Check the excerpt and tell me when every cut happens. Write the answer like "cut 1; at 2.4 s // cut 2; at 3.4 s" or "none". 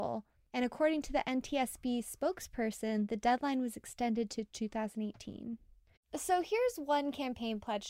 cut 1; at 6.0 s